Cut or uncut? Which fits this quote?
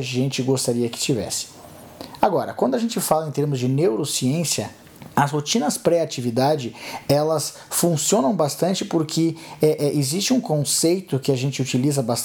uncut